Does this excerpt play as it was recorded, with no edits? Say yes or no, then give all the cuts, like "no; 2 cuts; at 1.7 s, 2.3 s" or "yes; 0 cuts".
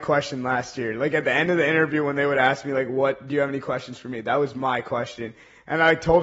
yes; 0 cuts